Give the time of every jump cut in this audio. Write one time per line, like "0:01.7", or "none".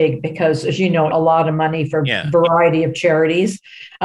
0:01.1